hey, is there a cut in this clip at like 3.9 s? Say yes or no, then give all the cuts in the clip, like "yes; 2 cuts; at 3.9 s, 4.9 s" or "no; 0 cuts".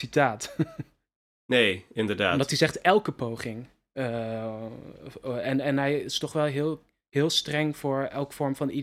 no; 0 cuts